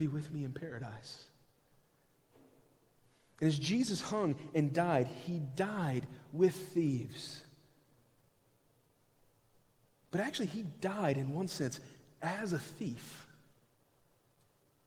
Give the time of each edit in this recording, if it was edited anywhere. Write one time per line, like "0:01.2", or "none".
none